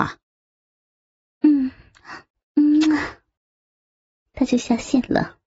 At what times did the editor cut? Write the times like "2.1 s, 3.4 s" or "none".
4.3 s